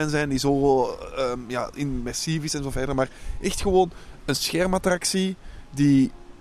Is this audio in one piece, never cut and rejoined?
yes; 0 cuts

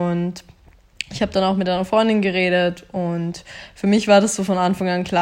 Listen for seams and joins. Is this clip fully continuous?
yes; 0 cuts

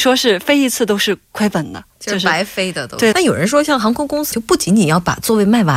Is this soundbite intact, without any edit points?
no; 2 cuts; at 3.1 s, 4.3 s

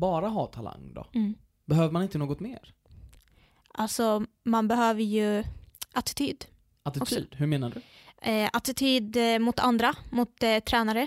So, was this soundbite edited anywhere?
no; 0 cuts

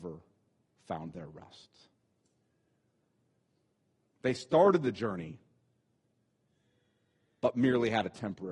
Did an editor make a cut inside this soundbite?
no; 0 cuts

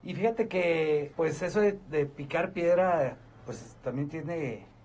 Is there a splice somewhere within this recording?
yes; 1 cut; at 1.1 s

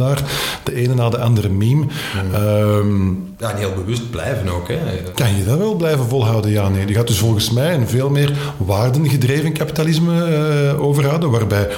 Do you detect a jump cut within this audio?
yes; 1 cut; at 5.1 s

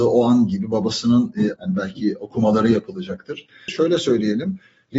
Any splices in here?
yes; 2 cuts; at 1.6 s, 3.7 s

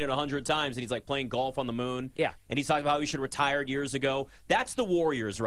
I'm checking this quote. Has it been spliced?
no; 0 cuts

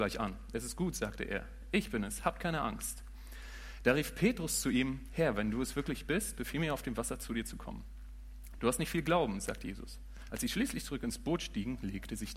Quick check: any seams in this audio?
yes; 2 cuts; at 8.6 s, 10.3 s

